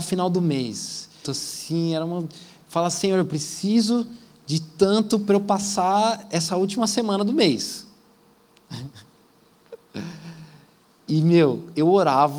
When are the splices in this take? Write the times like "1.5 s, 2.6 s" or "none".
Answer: 1.2 s